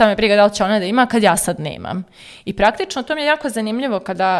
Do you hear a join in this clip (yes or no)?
no